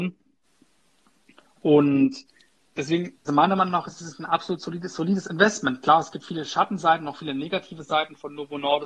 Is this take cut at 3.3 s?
yes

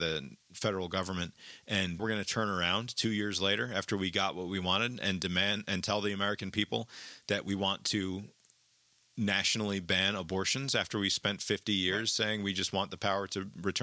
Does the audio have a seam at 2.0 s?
yes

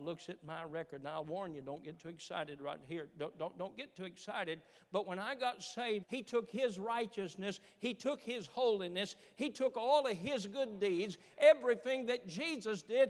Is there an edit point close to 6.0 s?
yes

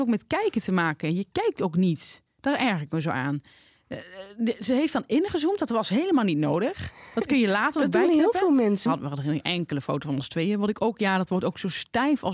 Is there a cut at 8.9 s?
yes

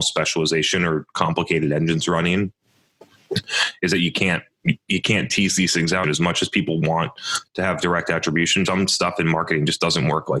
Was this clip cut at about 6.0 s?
yes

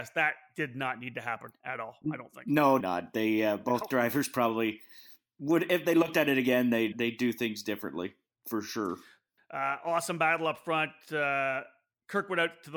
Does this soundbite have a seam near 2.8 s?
yes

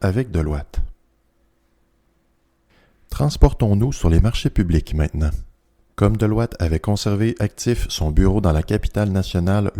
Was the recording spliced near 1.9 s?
no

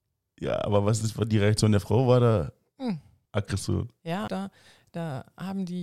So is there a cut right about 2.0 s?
no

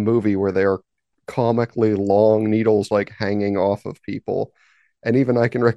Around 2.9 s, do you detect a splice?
yes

